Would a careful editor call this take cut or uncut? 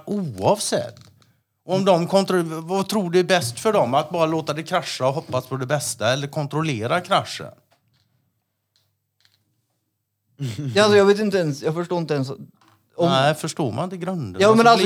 uncut